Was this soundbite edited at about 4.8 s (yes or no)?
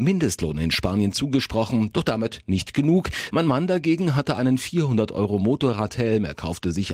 no